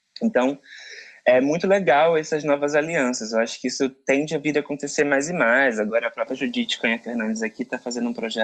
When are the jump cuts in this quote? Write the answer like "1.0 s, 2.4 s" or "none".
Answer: none